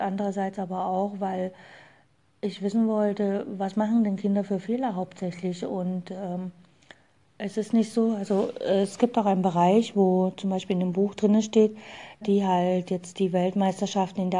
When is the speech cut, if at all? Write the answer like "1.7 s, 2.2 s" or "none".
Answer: 12.2 s